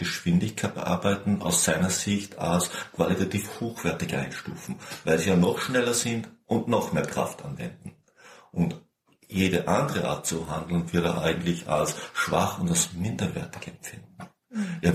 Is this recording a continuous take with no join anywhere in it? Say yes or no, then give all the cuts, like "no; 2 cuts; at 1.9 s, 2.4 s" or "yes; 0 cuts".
yes; 0 cuts